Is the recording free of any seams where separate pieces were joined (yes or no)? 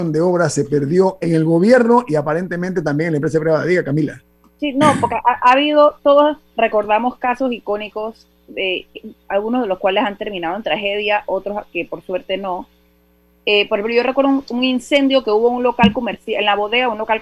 yes